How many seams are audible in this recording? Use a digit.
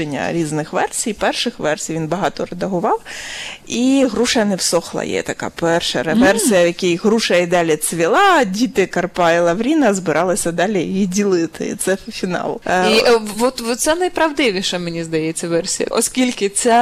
1